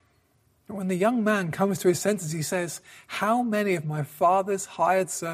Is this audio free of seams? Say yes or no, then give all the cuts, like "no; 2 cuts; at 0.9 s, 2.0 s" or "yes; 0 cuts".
yes; 0 cuts